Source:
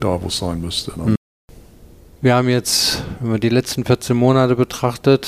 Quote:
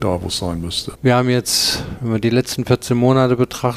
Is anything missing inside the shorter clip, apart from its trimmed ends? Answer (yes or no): yes